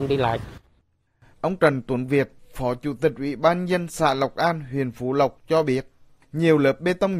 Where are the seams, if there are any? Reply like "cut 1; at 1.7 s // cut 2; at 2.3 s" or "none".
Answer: cut 1; at 1.3 s